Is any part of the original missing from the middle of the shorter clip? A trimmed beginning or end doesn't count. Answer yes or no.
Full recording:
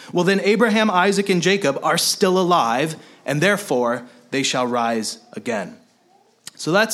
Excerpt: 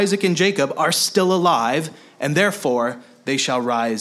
no